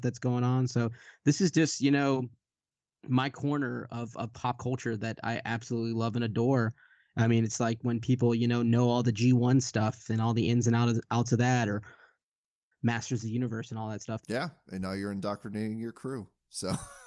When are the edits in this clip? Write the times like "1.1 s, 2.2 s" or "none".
14.2 s